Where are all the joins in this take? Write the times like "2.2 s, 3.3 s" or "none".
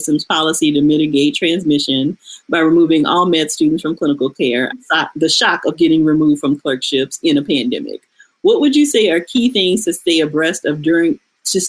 4.7 s